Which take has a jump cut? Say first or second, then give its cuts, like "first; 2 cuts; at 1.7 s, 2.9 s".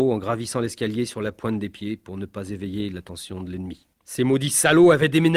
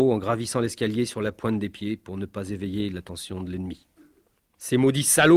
first; 1 cut; at 3.9 s